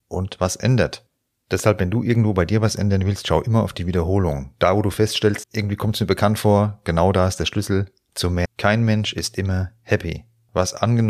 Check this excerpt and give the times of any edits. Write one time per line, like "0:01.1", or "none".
0:05.4
0:08.4